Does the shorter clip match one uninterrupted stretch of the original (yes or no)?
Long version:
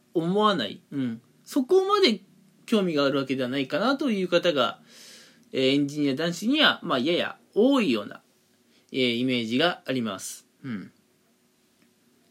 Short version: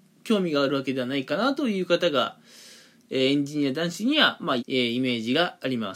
no